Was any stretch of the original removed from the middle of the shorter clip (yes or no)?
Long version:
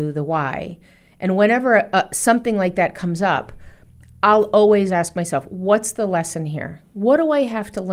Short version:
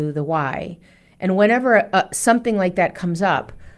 no